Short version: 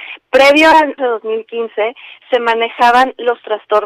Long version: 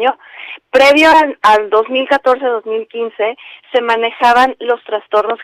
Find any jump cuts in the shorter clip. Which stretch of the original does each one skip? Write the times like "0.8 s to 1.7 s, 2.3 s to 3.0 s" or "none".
1.4 s to 2.4 s